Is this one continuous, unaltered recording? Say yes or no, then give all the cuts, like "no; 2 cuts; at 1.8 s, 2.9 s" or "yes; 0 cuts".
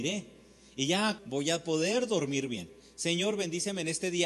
no; 1 cut; at 1.2 s